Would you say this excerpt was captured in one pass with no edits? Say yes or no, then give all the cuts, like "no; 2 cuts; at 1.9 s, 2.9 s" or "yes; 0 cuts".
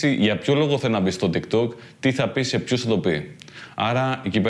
yes; 0 cuts